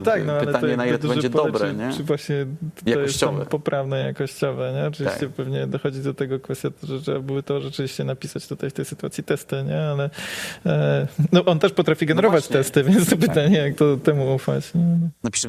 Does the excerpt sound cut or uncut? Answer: uncut